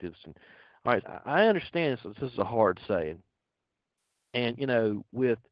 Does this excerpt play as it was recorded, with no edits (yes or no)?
no